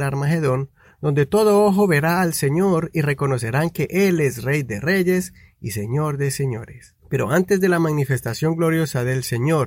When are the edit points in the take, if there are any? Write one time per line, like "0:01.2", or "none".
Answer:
0:07.0